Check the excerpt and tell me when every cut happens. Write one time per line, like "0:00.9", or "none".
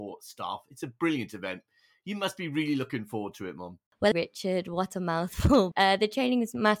0:04.1
0:05.7